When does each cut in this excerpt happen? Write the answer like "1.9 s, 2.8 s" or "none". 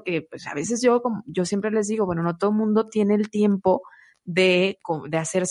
none